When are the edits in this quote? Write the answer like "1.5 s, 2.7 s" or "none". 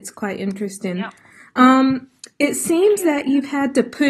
none

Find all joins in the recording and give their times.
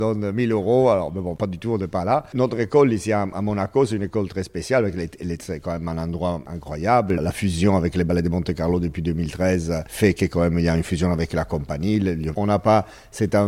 5.4 s, 12.3 s

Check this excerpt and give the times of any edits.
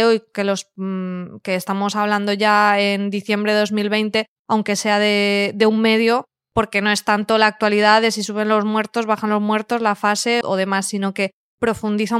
4.4 s, 10.4 s

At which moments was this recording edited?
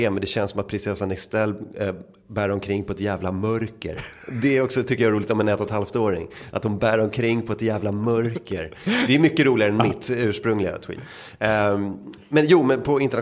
none

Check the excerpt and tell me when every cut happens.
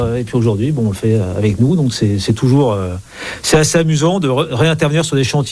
none

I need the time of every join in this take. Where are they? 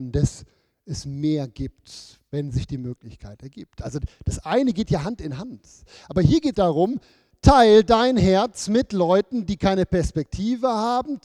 6.5 s

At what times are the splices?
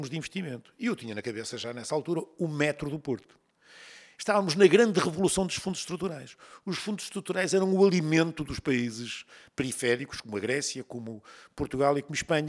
none

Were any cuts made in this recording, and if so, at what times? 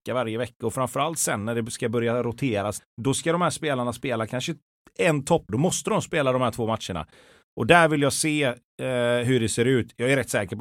2.8 s, 5.5 s

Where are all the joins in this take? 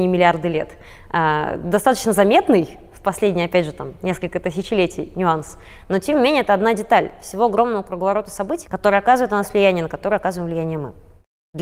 8.6 s

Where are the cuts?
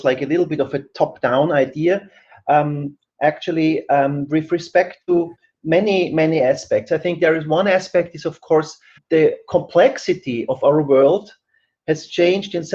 3.1 s, 9.0 s

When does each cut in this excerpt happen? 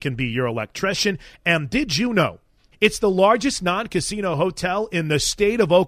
2.7 s

